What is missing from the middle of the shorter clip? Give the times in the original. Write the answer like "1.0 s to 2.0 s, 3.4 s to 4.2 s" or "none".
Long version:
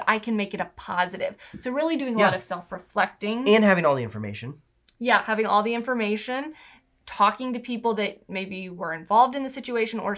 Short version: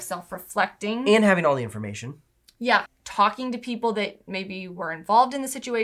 5.2 s to 6.9 s